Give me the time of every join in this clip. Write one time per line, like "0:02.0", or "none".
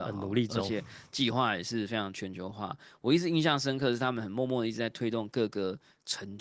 none